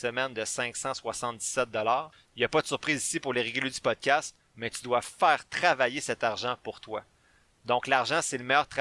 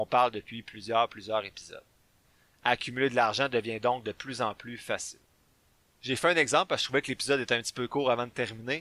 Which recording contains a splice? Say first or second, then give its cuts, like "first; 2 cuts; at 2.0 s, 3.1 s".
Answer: first; 1 cut; at 2.3 s